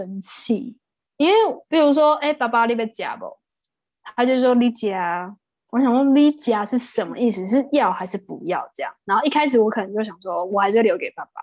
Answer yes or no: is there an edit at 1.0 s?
no